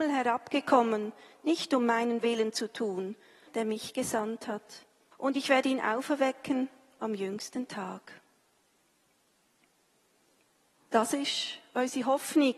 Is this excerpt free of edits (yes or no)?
no